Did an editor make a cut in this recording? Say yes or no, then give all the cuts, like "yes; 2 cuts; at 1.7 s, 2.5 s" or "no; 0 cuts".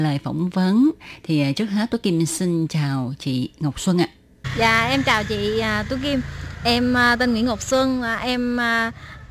no; 0 cuts